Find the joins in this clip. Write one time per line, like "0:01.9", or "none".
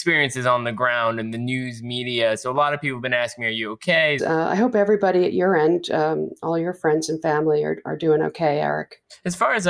0:04.2